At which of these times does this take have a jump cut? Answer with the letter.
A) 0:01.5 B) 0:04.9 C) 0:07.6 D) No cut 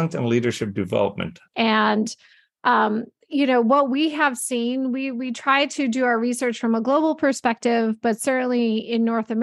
A